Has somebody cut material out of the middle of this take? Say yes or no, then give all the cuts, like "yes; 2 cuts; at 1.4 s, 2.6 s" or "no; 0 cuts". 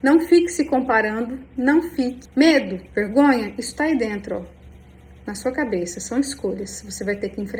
yes; 1 cut; at 2.3 s